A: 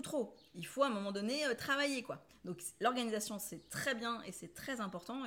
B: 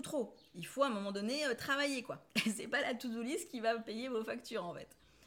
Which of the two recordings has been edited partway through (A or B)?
A